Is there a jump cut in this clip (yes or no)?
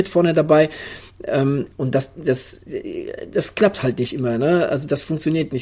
no